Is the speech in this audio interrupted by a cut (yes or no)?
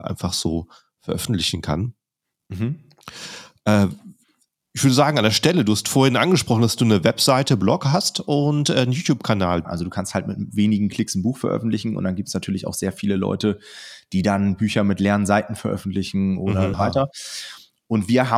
yes